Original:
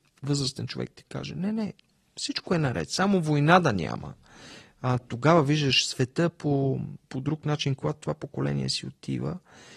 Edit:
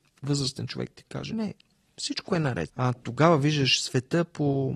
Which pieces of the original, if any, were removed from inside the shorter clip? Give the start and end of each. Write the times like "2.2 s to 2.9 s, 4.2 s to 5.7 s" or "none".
1.3 s to 1.5 s, 2.9 s to 4.7 s